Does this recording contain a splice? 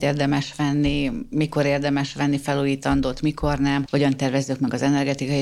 yes; 1 cut; at 3.9 s

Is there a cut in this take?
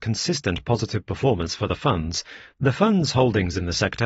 no; 0 cuts

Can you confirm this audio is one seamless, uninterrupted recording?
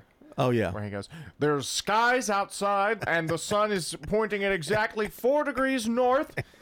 no; 1 cut; at 3.0 s

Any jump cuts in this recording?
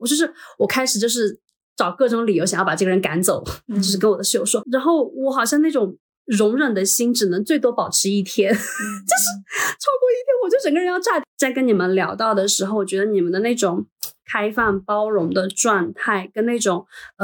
yes; 1 cut; at 4.6 s

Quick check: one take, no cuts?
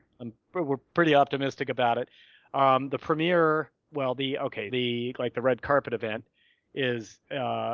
no; 1 cut; at 4.7 s

